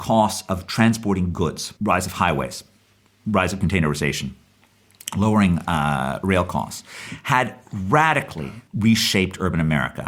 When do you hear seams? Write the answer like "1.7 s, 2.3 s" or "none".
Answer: 1.8 s, 8.7 s